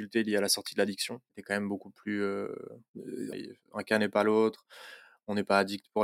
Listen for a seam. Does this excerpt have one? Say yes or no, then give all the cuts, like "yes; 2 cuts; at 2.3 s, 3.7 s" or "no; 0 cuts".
yes; 1 cut; at 3.3 s